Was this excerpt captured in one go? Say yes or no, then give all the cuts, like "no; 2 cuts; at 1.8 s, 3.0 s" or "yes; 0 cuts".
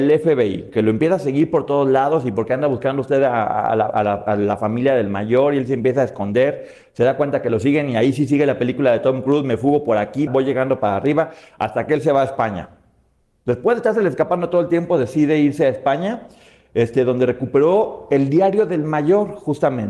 no; 1 cut; at 10.3 s